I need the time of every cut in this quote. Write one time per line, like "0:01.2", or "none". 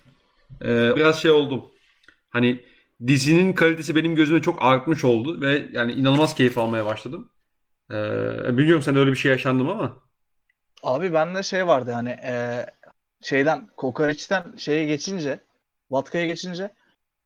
0:00.9